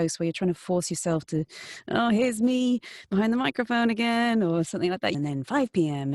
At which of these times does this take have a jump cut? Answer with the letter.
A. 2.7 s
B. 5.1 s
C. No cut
B